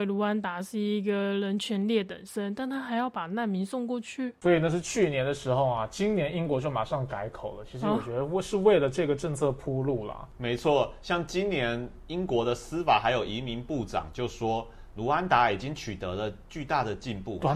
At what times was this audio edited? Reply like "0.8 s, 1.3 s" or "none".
none